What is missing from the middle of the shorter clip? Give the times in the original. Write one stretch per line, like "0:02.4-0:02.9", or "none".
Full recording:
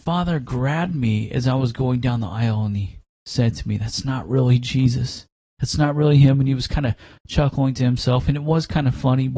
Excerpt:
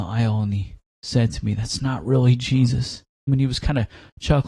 0:05.5-0:06.4